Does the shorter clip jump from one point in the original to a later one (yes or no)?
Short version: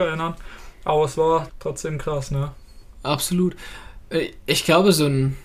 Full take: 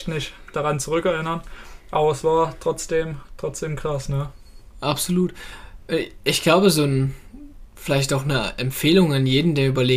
yes